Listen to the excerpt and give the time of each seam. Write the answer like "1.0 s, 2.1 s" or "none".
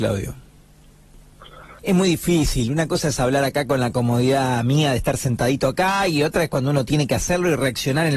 1.8 s